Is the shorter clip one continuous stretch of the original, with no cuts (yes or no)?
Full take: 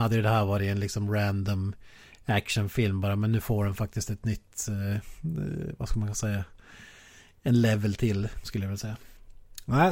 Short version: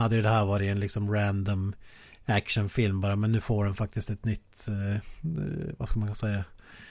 yes